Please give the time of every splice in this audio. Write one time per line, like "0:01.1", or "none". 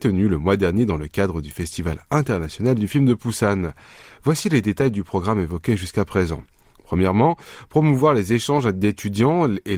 none